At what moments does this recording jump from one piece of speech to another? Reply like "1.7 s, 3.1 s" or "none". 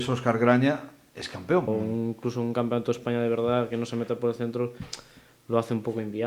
1.7 s